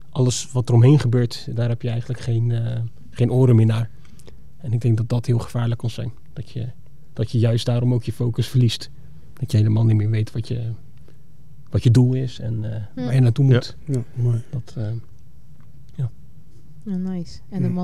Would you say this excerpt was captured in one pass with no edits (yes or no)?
yes